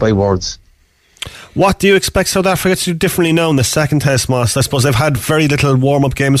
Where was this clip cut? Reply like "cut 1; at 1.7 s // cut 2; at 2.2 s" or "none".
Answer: none

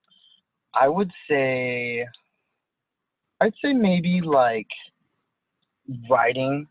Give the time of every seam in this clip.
cut 1; at 3.2 s

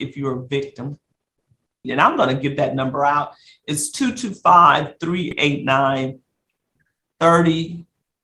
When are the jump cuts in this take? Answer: cut 1; at 1.8 s

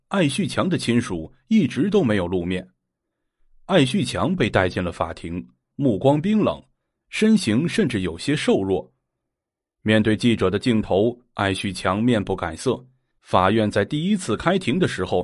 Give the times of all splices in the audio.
cut 1; at 5.7 s // cut 2; at 13.2 s

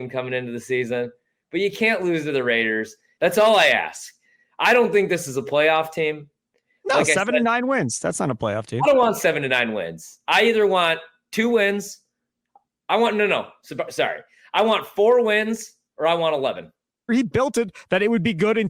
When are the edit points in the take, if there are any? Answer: cut 1; at 3.2 s // cut 2; at 17.1 s

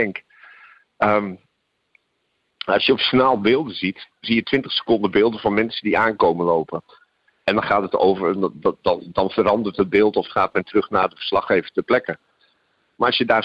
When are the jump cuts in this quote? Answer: cut 1; at 2.5 s

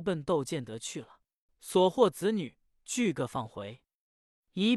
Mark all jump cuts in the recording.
cut 1; at 1.5 s

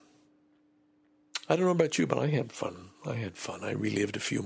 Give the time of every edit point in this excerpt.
none

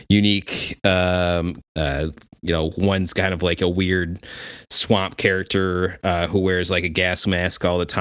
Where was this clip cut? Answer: cut 1; at 1.6 s

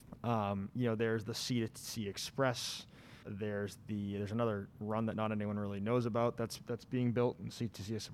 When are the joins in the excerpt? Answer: cut 1; at 3.2 s

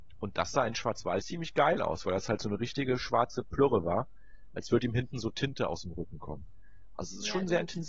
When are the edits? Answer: cut 1; at 1.2 s

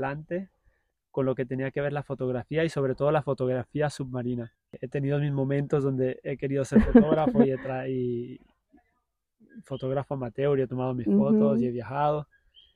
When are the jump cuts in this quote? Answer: cut 1; at 4.5 s

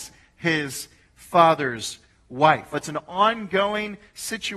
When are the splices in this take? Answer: cut 1; at 2.7 s

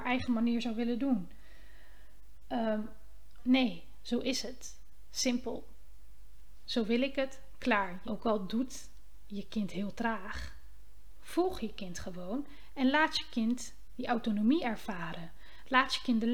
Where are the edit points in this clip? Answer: cut 1; at 3.4 s // cut 2; at 8.0 s

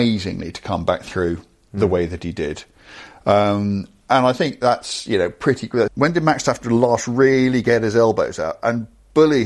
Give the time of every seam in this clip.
cut 1; at 5.9 s

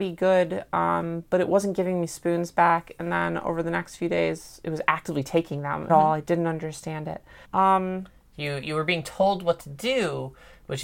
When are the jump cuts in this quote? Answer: cut 1; at 5.9 s // cut 2; at 7.4 s

